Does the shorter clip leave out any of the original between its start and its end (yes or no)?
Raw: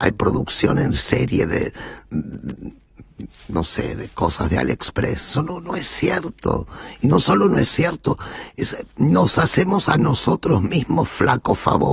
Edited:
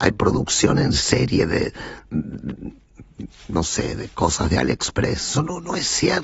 no